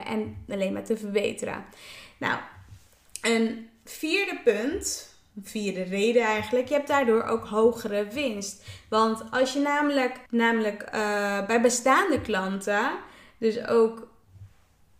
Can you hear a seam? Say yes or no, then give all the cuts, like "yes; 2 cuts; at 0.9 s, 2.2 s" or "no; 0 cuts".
yes; 1 cut; at 10.3 s